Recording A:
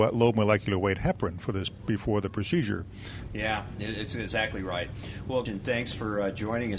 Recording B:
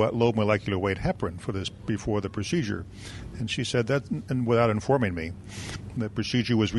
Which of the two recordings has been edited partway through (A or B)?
A